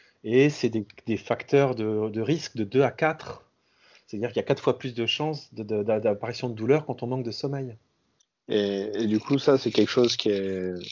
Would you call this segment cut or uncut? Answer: uncut